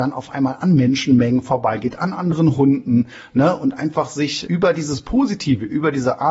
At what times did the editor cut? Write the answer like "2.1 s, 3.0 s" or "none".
4.5 s